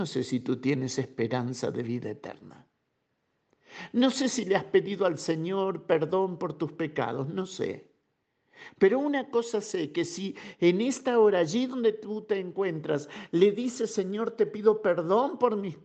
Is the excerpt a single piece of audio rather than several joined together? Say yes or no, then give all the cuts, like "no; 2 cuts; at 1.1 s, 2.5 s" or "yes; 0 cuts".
yes; 0 cuts